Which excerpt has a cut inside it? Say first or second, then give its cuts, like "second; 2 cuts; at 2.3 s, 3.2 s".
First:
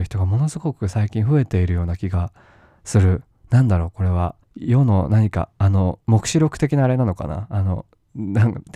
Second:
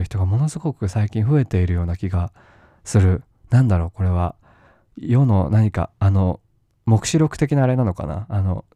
first; 2 cuts; at 4.4 s, 6.0 s